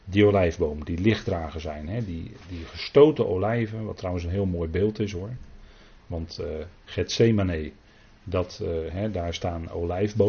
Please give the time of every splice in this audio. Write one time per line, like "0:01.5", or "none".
none